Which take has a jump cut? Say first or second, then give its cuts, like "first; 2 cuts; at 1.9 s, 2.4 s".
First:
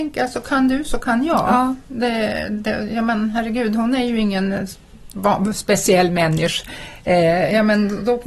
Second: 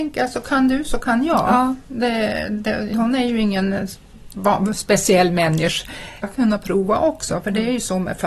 second; 2 cuts; at 2.9 s, 6.2 s